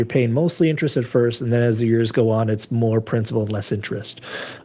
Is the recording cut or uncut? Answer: uncut